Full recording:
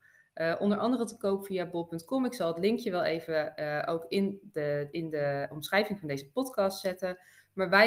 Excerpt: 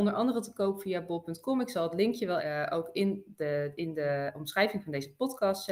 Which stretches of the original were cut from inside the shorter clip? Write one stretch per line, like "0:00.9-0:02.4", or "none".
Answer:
0:03.0-0:03.5